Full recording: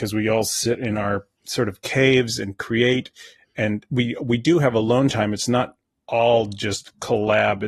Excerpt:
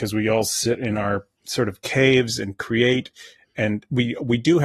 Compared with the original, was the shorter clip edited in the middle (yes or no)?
no